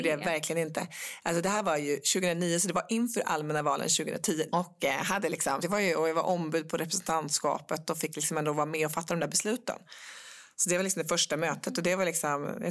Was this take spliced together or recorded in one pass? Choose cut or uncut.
cut